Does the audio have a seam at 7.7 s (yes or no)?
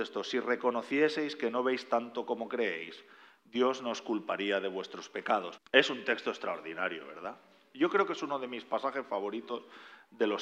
no